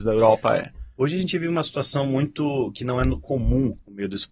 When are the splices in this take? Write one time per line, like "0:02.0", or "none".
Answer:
none